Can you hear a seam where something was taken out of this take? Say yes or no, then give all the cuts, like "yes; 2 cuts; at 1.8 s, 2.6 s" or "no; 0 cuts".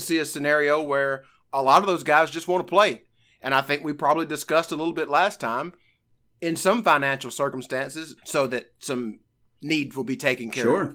yes; 1 cut; at 8.2 s